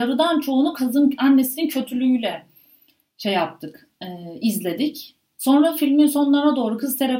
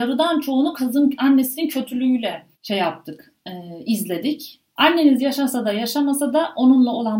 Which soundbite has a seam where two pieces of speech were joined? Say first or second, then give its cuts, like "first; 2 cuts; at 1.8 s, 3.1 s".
second; 2 cuts; at 2.5 s, 4.8 s